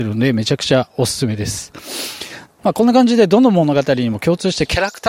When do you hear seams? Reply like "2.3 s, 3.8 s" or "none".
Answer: 2.6 s